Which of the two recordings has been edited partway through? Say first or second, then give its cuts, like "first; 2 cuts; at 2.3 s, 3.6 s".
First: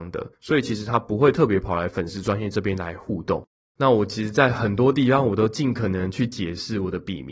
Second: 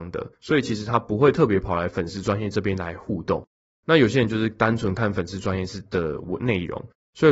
first; 1 cut; at 3.6 s